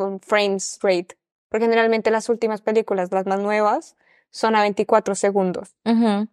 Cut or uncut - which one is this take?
uncut